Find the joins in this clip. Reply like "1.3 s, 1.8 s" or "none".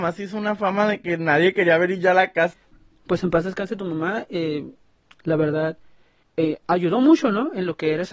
none